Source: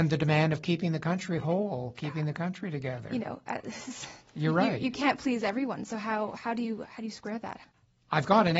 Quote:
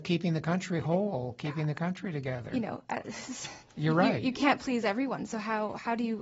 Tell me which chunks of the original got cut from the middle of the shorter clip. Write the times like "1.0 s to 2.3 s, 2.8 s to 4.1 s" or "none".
none